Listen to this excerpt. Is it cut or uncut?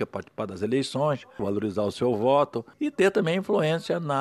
cut